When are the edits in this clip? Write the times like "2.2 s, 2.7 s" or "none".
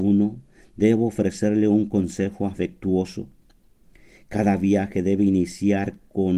none

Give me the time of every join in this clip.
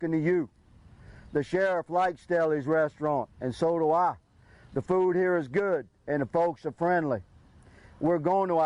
none

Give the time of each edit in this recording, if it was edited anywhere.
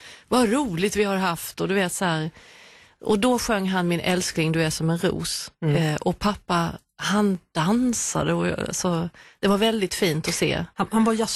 none

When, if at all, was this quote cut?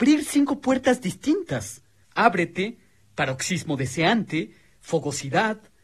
2.0 s

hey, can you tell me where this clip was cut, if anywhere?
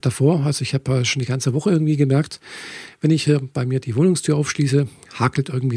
none

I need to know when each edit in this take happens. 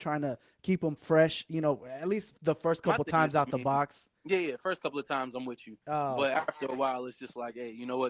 4.2 s

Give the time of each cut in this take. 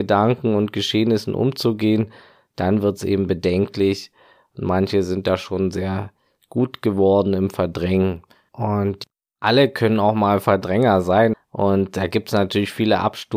8.5 s, 11.3 s

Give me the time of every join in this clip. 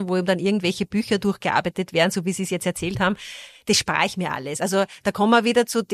none

